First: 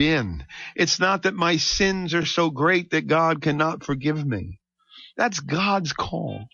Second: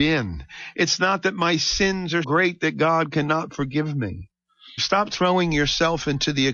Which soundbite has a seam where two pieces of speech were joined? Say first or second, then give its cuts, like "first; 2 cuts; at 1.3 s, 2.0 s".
second; 2 cuts; at 2.2 s, 4.8 s